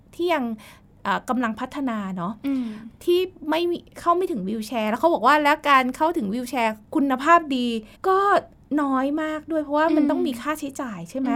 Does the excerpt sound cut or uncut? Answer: cut